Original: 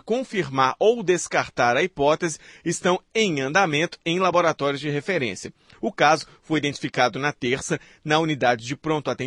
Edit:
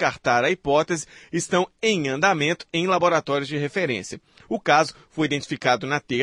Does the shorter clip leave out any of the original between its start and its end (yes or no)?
no